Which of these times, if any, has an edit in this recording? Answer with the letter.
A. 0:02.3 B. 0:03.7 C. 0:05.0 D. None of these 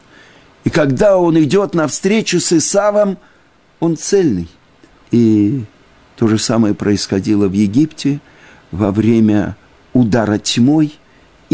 C